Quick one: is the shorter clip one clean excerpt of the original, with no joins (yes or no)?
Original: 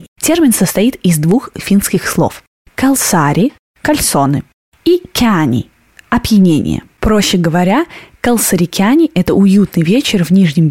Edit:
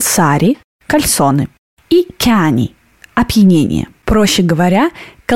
yes